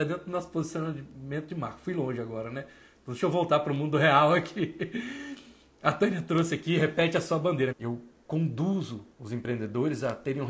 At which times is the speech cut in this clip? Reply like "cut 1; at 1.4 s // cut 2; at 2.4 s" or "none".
cut 1; at 7.7 s // cut 2; at 9.1 s